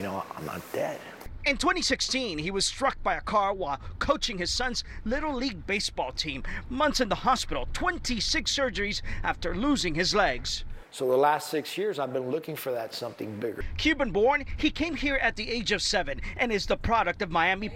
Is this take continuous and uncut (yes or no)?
yes